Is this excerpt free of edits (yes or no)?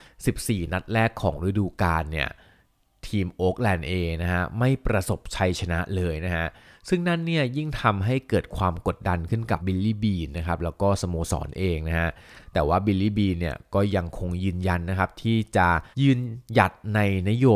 no